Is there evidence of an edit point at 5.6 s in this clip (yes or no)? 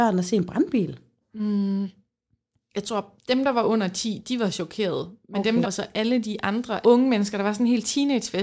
yes